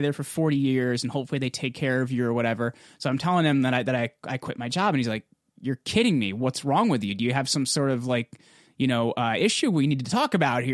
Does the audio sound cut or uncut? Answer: uncut